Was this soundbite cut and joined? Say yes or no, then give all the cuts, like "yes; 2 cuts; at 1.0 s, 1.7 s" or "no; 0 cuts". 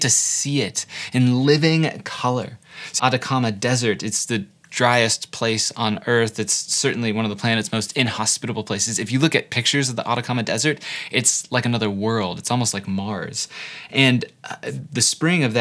yes; 1 cut; at 3.0 s